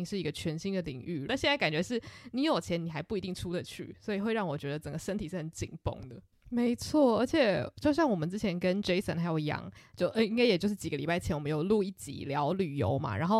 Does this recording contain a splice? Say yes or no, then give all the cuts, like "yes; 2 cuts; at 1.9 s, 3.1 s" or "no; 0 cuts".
yes; 2 cuts; at 1.3 s, 6.3 s